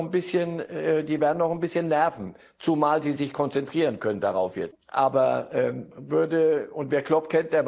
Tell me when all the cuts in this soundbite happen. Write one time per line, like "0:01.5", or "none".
0:04.7
0:05.9